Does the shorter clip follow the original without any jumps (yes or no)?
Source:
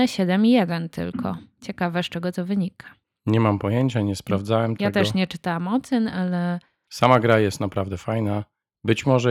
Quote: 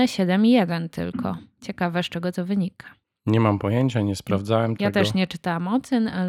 yes